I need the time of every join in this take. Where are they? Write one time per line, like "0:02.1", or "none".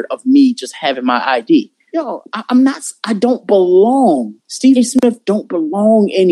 0:01.9
0:04.4